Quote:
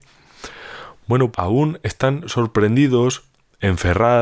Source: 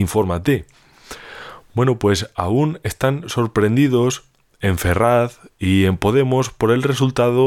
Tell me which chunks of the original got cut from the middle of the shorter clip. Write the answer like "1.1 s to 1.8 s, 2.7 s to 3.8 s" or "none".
2.0 s to 2.3 s

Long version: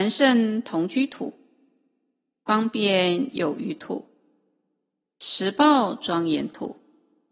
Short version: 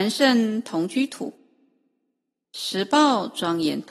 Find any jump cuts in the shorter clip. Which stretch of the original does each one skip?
2.4 s to 5.1 s

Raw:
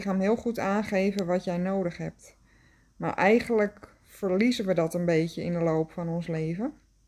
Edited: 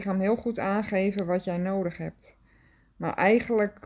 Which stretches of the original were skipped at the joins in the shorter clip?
none

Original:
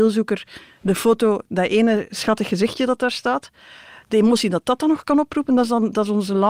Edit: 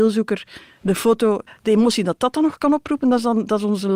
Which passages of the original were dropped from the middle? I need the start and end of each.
1.5 s to 3.9 s

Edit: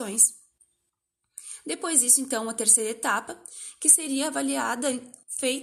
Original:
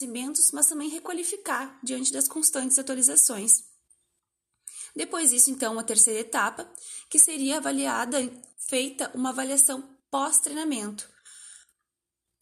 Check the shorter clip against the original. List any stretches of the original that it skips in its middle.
none

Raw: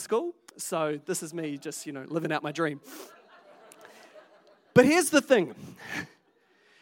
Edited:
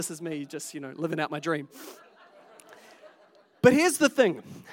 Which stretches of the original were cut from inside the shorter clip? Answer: none

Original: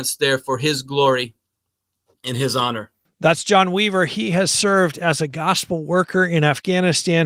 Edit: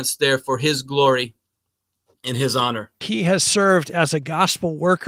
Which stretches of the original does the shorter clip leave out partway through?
3.0 s to 4.1 s

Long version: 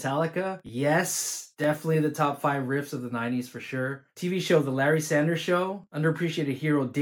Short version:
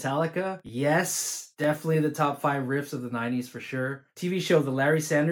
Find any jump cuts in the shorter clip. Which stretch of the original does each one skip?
none

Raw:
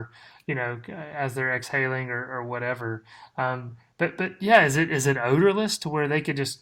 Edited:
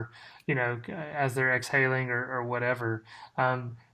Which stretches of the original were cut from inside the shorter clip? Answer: none

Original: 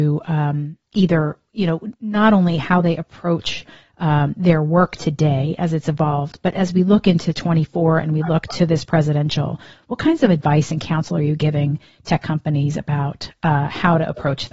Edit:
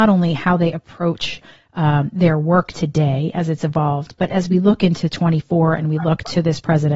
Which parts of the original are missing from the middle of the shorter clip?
none

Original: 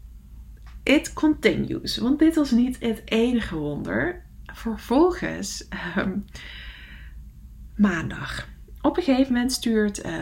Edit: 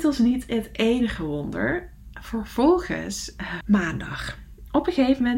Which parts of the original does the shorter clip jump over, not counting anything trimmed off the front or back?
5.9 s to 7.7 s

